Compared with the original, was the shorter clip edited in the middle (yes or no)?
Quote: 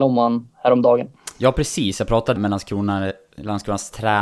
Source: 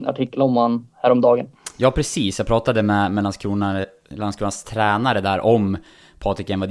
yes